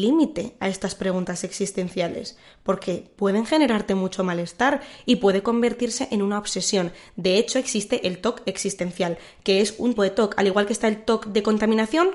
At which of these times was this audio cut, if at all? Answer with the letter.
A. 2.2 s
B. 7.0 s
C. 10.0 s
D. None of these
C